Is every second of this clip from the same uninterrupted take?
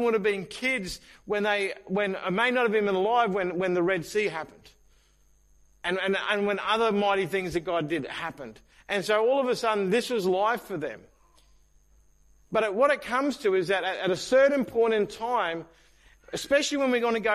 yes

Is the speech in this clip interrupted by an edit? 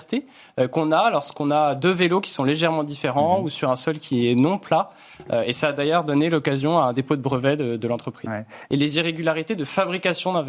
yes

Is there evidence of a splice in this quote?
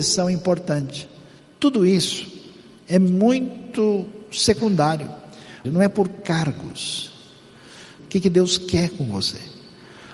yes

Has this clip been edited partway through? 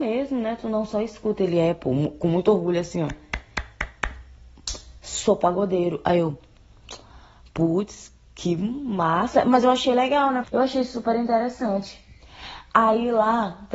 yes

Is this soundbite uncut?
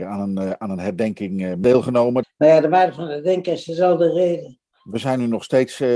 no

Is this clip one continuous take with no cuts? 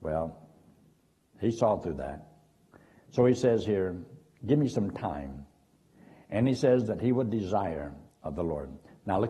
yes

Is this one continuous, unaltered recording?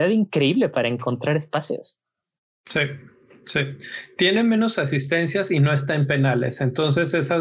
yes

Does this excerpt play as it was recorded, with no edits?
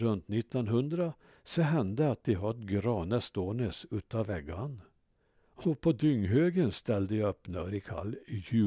yes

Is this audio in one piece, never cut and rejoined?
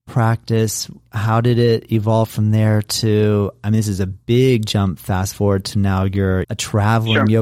no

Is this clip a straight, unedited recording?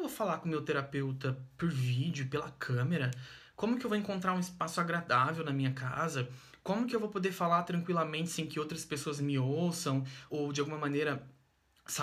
no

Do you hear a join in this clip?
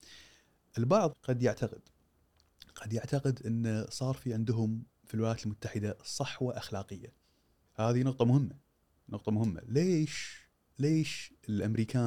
yes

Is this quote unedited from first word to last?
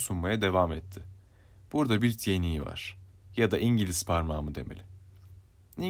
no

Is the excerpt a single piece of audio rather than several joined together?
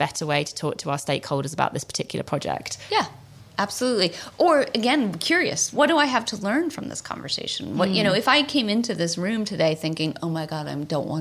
yes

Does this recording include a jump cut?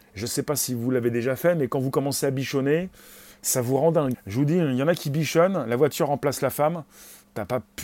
yes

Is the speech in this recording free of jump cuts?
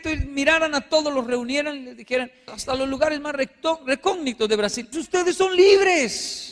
no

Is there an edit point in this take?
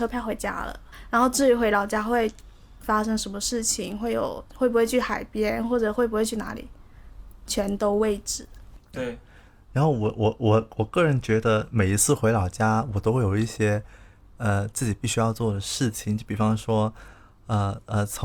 yes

